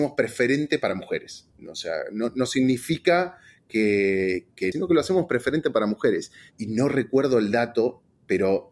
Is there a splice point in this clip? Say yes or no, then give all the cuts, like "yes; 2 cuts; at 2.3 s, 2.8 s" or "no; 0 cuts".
yes; 2 cuts; at 1.6 s, 4.7 s